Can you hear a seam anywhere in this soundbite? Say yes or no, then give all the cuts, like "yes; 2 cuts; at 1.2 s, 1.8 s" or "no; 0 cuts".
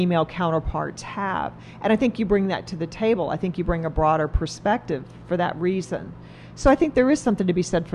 no; 0 cuts